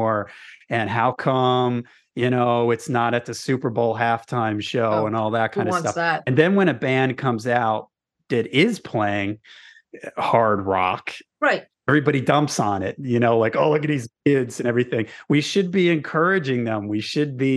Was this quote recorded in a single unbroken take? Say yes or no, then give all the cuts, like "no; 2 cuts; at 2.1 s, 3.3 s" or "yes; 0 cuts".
yes; 0 cuts